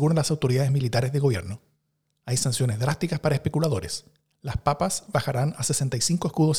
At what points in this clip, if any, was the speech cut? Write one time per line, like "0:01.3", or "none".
none